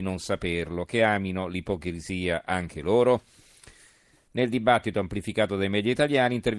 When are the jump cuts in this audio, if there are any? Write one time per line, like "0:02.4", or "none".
0:04.3